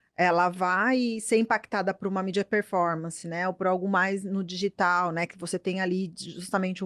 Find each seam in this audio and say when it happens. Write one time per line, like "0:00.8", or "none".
none